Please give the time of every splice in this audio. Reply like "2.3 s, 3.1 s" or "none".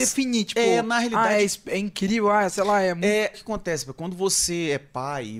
3.3 s